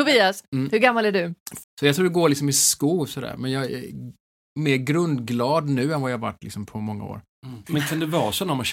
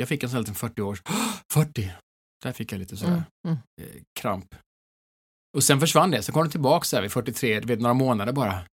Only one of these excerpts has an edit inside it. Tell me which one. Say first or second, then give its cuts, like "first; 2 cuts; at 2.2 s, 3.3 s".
first; 1 cut; at 1.6 s